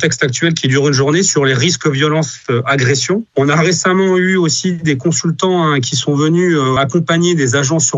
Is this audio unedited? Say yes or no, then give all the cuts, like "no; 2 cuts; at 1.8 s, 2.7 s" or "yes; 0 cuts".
no; 1 cut; at 6.8 s